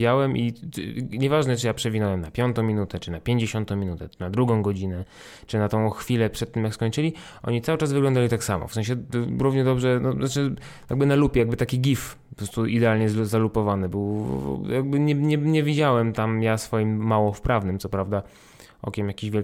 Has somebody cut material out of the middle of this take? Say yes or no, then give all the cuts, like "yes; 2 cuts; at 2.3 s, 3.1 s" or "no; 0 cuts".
no; 0 cuts